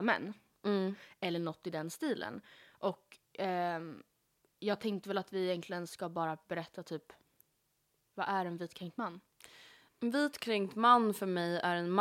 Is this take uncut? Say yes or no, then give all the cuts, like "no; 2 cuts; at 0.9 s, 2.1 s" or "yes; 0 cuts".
yes; 0 cuts